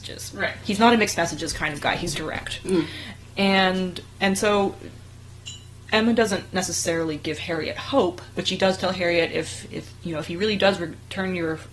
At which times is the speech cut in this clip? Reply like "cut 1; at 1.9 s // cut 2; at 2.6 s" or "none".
cut 1; at 2.1 s